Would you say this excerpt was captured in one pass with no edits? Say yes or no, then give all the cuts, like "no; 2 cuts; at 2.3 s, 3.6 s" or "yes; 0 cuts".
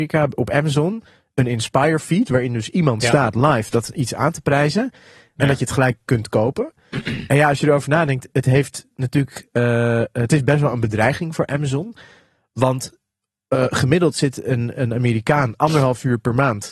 yes; 0 cuts